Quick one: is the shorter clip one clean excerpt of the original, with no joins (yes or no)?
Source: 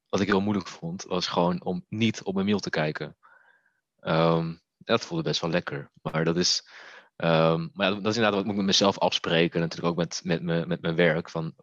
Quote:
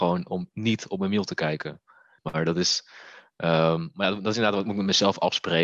no